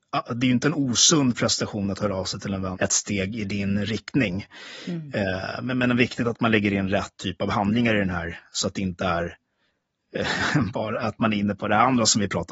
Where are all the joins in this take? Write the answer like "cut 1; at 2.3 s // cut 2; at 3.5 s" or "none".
cut 1; at 2.7 s